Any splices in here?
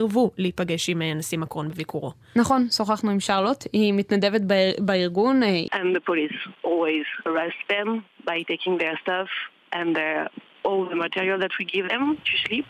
yes; 1 cut; at 5.7 s

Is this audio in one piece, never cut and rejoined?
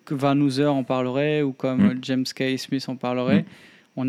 yes; 0 cuts

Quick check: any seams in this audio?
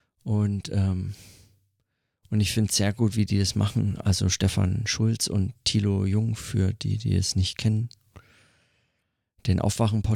no; 0 cuts

